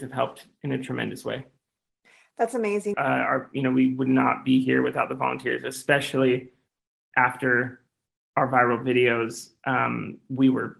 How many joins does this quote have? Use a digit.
1